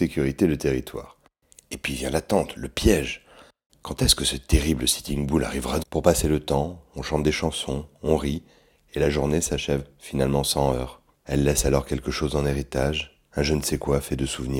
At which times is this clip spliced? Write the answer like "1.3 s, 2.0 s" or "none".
5.8 s, 11.1 s, 13.2 s